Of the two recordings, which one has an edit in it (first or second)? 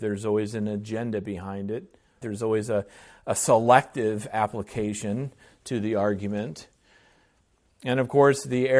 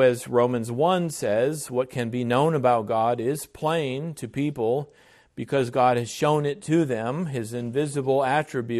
first